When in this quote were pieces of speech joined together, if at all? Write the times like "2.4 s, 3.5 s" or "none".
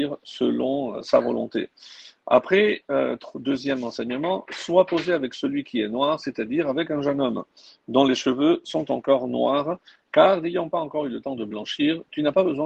none